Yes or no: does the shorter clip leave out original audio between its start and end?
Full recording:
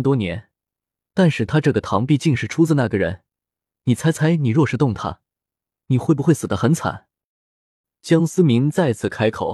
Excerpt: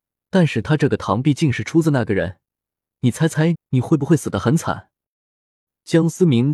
yes